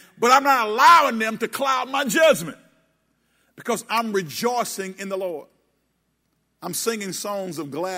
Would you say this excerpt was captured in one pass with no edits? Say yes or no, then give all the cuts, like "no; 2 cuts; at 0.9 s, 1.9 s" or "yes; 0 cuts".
yes; 0 cuts